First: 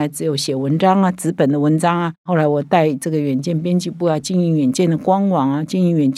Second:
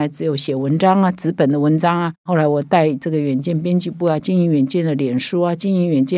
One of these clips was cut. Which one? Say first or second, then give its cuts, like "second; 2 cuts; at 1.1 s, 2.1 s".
second; 1 cut; at 4.2 s